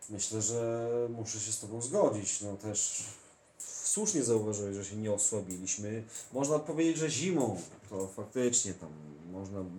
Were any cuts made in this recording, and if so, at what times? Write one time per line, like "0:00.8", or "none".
none